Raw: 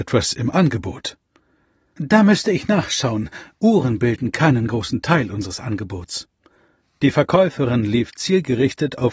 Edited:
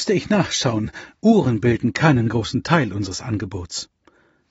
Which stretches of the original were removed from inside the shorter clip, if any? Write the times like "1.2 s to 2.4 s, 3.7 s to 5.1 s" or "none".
none

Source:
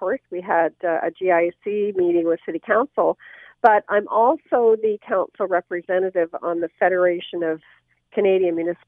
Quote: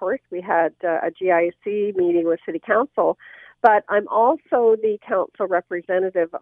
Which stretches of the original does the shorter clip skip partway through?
none

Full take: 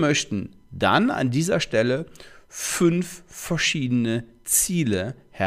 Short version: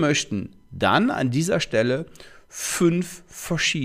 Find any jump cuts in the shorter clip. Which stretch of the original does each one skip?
none

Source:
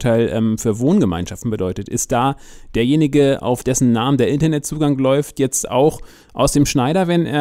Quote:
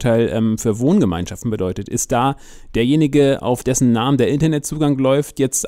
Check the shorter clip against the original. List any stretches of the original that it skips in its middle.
none

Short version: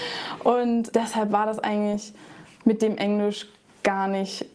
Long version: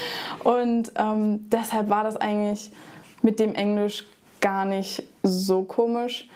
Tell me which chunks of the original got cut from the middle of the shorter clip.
0.9 s to 1.5 s

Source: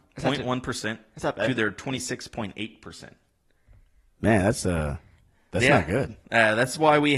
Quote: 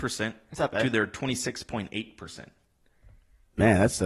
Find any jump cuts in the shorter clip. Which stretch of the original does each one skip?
none

